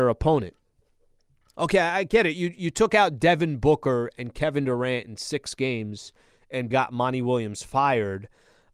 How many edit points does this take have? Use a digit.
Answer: 1